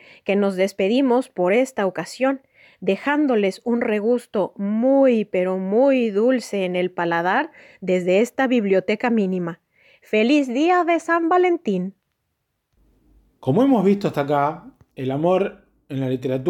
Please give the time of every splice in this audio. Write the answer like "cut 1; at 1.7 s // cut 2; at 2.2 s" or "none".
none